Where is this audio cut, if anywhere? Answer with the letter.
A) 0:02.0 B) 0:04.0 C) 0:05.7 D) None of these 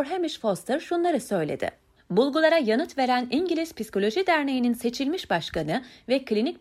A